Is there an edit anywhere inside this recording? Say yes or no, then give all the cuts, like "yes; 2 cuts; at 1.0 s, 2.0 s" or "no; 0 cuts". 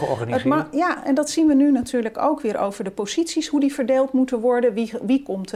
no; 0 cuts